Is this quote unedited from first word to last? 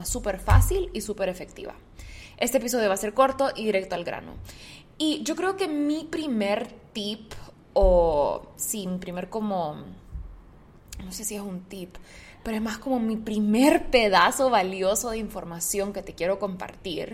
yes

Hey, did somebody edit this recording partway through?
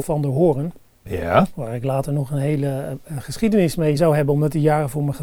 no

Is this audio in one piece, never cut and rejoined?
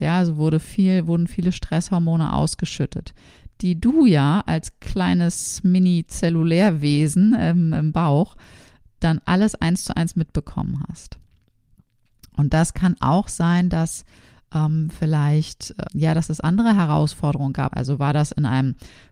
no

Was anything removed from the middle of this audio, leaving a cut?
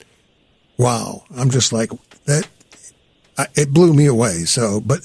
no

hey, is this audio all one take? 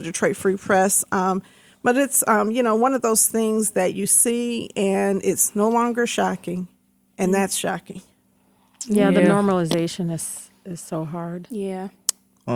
yes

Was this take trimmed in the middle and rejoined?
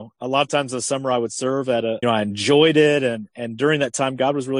yes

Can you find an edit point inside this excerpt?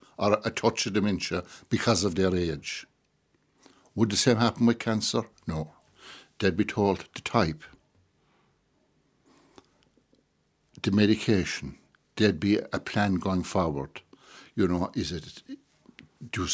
no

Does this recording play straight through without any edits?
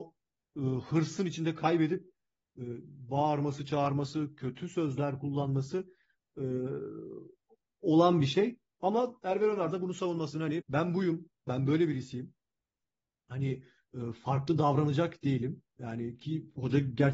no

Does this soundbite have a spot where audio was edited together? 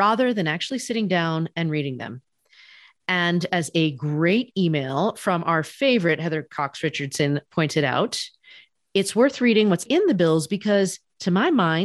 yes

